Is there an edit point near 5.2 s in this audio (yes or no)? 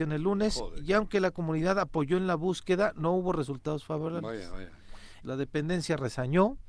yes